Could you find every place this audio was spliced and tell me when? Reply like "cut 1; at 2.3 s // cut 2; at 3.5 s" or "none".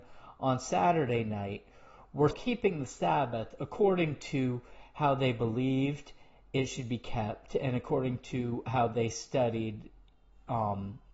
cut 1; at 2.3 s